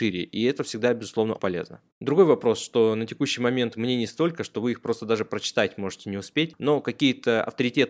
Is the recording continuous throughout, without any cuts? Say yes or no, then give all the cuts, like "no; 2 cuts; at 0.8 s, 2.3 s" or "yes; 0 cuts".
no; 1 cut; at 1.4 s